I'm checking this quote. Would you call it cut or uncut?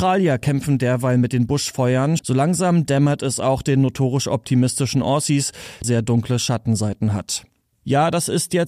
cut